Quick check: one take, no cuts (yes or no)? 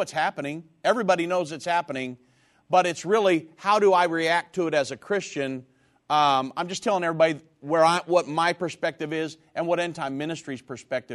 yes